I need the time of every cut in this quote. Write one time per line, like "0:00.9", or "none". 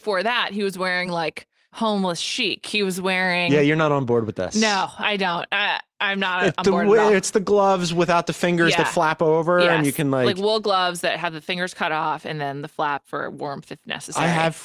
none